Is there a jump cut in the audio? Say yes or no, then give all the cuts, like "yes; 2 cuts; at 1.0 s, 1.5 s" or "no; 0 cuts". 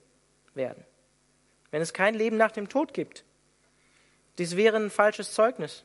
no; 0 cuts